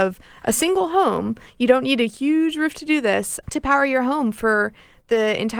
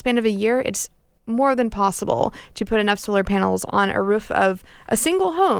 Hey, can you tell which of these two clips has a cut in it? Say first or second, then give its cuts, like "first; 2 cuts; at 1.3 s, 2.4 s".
first; 1 cut; at 3.4 s